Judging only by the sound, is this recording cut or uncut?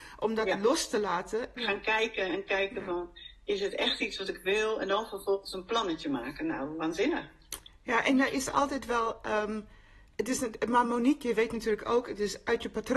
cut